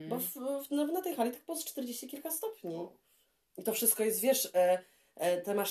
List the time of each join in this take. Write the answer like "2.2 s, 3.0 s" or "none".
none